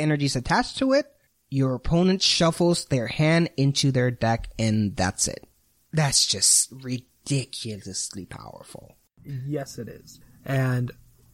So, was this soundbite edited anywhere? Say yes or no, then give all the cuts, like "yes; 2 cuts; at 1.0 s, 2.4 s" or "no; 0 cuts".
no; 0 cuts